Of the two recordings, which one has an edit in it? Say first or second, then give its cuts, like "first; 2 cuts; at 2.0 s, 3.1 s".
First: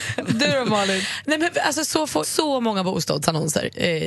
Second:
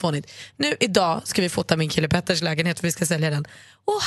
first; 1 cut; at 2.2 s